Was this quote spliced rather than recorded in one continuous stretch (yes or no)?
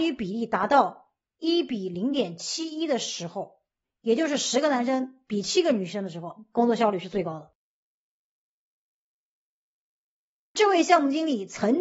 no